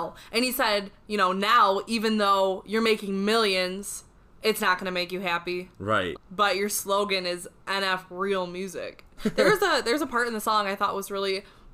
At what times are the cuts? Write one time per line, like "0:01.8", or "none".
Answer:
0:06.1
0:09.2